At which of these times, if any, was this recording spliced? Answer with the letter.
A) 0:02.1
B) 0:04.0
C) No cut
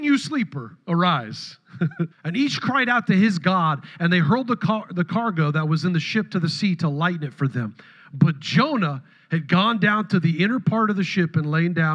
A